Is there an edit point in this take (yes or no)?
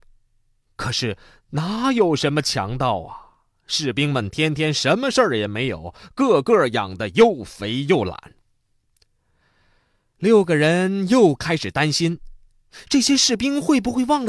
no